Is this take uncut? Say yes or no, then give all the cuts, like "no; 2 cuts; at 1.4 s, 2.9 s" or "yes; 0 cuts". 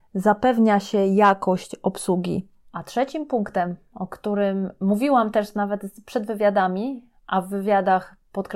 no; 2 cuts; at 2.6 s, 7.2 s